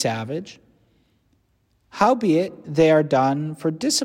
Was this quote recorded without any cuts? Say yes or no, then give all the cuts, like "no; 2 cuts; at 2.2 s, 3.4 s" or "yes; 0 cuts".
yes; 0 cuts